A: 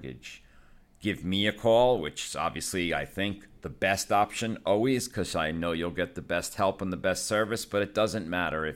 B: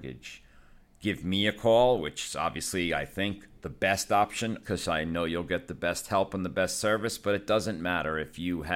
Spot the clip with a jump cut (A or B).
B